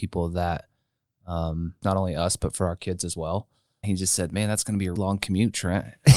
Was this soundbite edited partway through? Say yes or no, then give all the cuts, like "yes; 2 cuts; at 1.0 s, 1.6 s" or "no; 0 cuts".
yes; 3 cuts; at 1.8 s, 3.8 s, 5.0 s